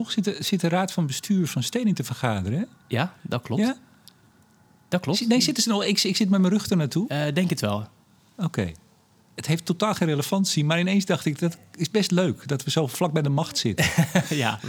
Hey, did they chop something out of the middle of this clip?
no; 0 cuts

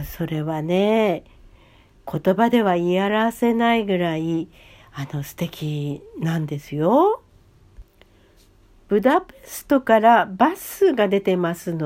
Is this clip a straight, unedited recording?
yes; 0 cuts

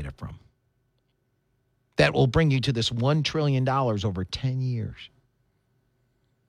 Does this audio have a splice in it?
no; 0 cuts

